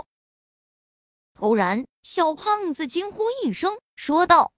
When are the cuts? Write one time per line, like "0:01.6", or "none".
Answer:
none